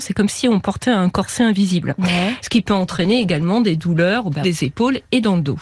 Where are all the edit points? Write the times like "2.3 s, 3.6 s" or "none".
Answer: 2.4 s, 4.4 s